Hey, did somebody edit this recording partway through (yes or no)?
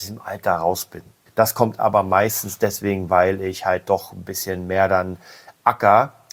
yes